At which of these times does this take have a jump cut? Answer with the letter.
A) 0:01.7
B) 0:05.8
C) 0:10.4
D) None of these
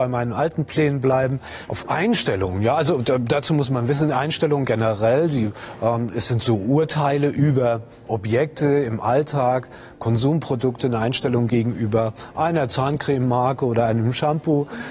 A